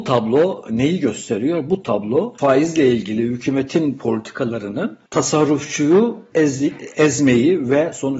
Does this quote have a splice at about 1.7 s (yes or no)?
no